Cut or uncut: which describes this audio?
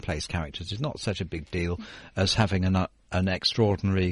uncut